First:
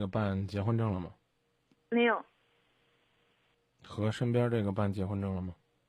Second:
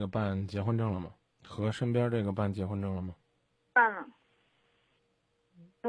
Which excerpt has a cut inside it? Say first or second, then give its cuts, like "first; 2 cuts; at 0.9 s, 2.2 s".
second; 1 cut; at 1.3 s